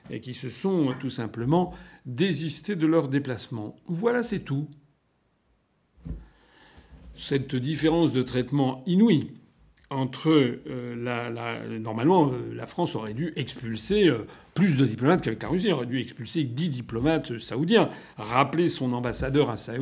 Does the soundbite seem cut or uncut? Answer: uncut